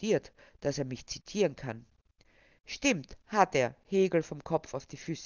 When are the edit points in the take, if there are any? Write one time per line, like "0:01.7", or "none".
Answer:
none